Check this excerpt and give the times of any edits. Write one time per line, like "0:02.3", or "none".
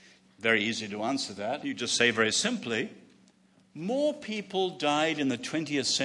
0:01.6